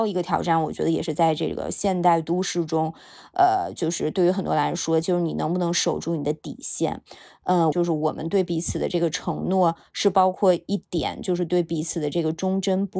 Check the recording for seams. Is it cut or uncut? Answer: cut